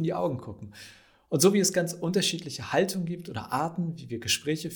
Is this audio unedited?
yes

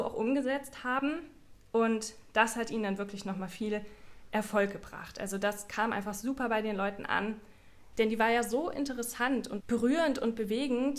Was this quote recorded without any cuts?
no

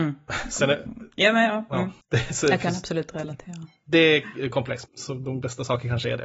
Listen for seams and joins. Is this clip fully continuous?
no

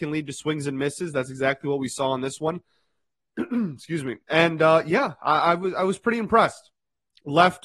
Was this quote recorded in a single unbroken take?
yes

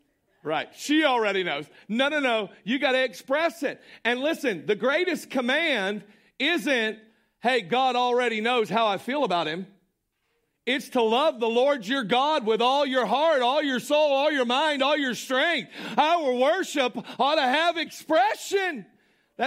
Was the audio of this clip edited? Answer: no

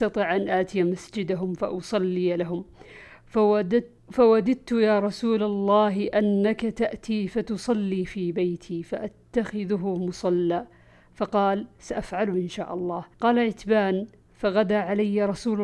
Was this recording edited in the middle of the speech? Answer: yes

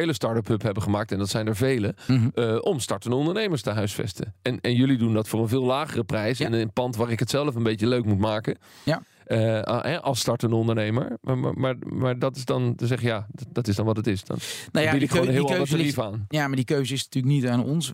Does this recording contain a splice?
no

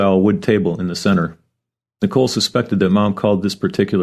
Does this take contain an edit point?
no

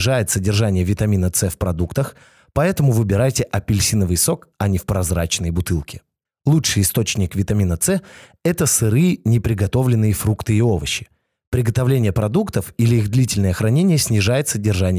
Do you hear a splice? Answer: yes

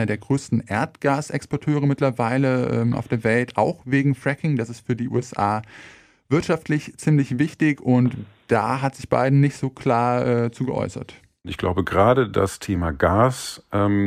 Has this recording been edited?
no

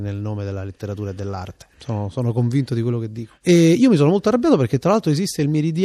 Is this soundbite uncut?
no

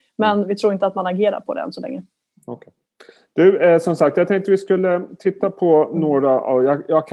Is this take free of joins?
yes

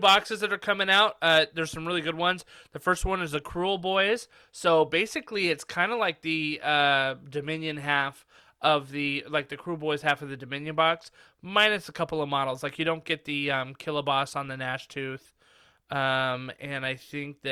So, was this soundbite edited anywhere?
no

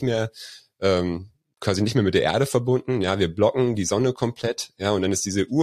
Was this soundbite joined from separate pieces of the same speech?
no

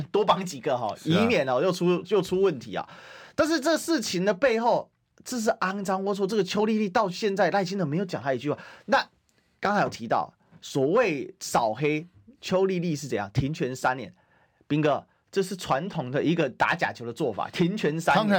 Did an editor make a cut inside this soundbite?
no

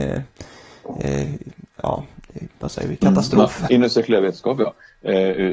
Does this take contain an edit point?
yes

